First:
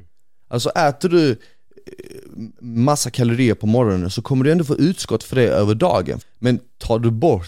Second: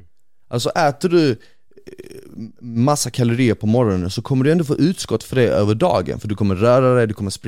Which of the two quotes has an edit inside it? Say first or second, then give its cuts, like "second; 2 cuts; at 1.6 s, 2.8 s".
first; 1 cut; at 6.2 s